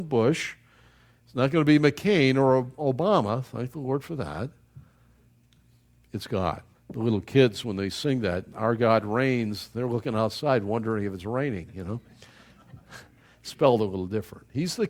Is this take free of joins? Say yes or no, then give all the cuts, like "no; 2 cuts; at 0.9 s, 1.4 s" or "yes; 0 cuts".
no; 1 cut; at 6.7 s